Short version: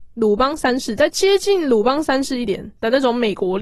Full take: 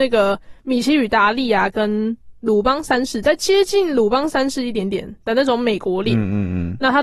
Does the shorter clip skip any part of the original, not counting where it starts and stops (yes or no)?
yes